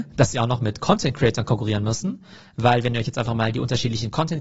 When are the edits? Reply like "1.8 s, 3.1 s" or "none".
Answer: none